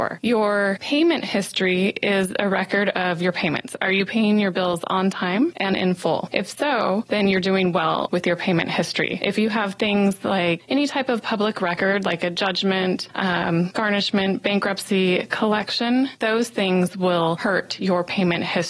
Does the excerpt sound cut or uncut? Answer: uncut